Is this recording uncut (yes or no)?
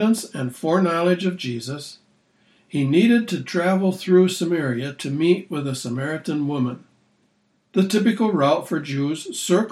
no